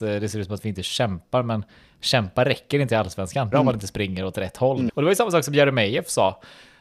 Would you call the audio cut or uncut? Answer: cut